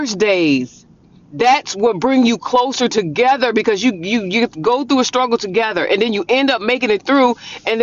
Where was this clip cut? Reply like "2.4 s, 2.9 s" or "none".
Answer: none